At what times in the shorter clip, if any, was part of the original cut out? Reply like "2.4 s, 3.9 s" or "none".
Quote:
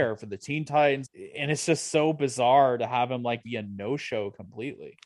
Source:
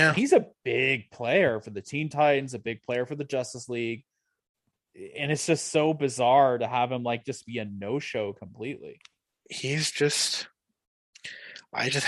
1.0 s, 3.4 s